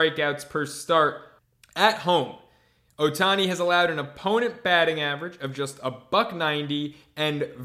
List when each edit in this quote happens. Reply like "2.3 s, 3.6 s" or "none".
none